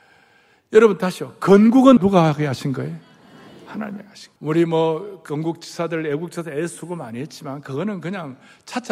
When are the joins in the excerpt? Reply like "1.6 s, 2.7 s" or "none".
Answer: 2.0 s, 4.4 s